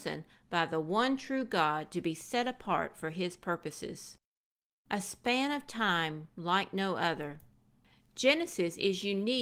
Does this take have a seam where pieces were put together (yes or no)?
no